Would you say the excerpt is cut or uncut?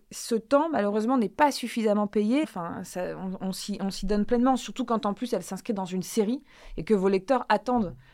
cut